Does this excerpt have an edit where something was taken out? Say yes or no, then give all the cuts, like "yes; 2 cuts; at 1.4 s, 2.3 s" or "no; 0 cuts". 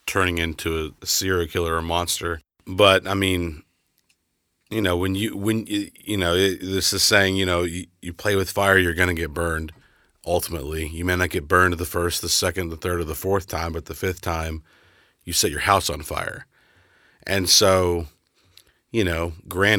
no; 0 cuts